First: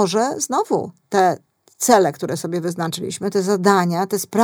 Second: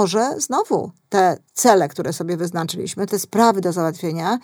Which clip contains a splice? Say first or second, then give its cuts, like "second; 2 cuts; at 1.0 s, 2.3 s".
second; 2 cuts; at 1.5 s, 3.1 s